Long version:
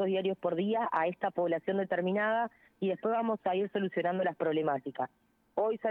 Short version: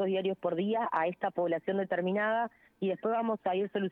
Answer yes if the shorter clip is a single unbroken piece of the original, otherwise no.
yes